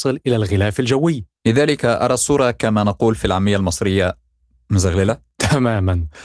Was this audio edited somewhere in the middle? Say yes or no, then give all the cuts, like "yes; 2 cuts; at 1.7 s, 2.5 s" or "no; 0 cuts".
yes; 1 cut; at 1.3 s